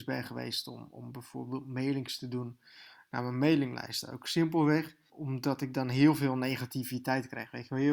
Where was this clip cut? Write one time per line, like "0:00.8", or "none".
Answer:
0:05.1